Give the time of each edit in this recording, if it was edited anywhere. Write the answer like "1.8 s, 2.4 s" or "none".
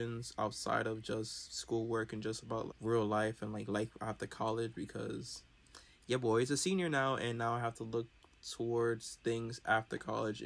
2.7 s